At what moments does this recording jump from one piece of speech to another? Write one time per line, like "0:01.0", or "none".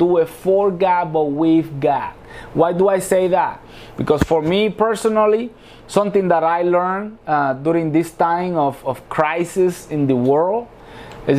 none